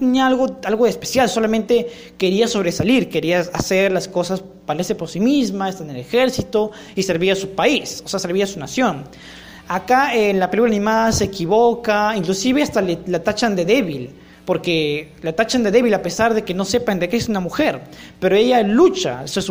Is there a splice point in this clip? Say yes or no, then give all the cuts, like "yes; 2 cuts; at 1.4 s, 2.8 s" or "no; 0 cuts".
no; 0 cuts